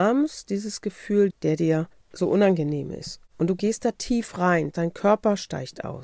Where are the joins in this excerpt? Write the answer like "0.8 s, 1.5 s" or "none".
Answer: 1.3 s, 4.7 s